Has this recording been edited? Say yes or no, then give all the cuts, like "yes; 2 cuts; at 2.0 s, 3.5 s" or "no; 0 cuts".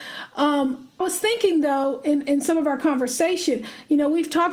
yes; 1 cut; at 1.0 s